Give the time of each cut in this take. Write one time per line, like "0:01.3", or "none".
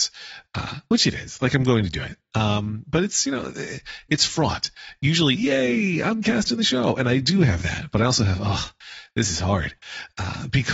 0:05.4